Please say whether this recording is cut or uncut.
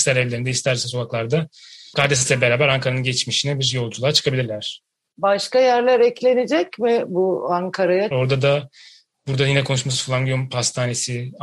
cut